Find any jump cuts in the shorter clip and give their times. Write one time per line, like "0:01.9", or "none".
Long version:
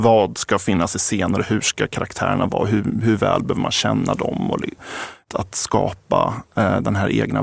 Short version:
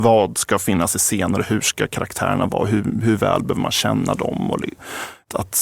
none